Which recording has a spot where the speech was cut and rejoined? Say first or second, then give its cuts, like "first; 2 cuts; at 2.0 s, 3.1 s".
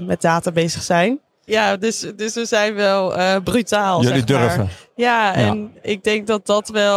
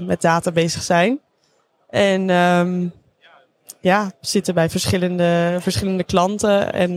first; 1 cut; at 1.5 s